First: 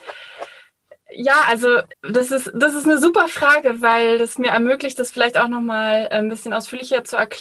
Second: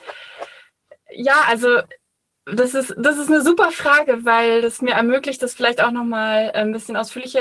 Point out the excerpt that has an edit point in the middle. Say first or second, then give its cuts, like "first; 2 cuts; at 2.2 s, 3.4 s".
first; 1 cut; at 1.9 s